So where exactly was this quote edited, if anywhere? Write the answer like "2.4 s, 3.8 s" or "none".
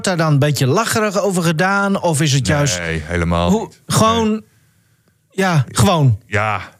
3.8 s, 5.7 s